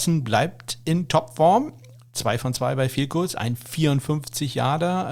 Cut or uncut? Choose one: uncut